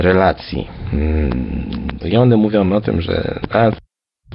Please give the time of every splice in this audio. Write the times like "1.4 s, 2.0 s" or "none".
2.0 s